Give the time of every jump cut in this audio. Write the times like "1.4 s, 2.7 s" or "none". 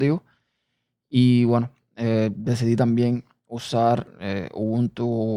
none